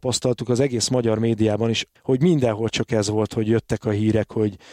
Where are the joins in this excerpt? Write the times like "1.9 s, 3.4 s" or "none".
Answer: 1.9 s